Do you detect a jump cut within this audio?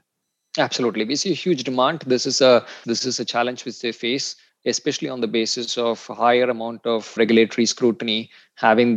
yes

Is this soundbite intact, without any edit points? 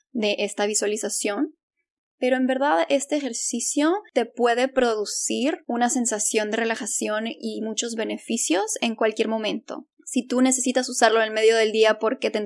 yes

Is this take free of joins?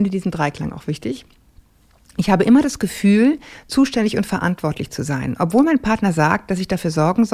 yes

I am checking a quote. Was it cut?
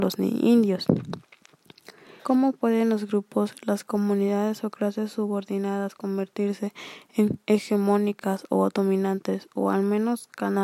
yes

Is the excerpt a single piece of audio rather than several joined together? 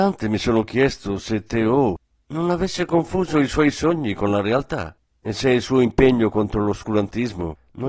no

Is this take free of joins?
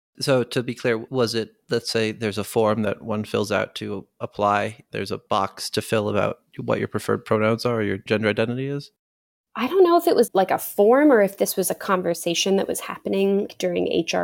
yes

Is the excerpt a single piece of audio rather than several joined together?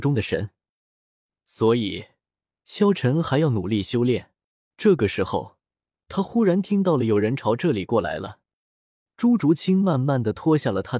no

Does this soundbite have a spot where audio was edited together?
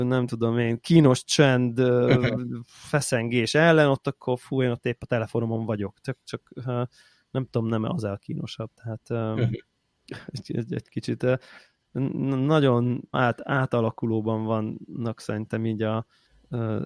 yes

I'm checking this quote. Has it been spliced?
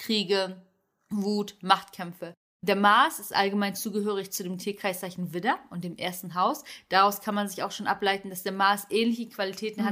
no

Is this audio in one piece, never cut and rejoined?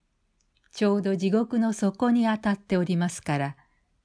yes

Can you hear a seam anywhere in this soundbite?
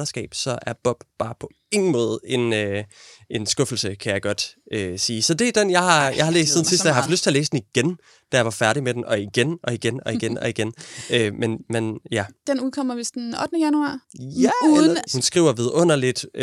yes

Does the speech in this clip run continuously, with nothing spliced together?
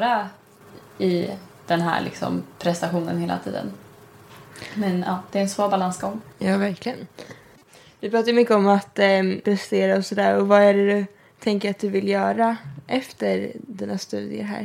no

